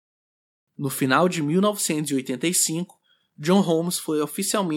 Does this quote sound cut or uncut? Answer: uncut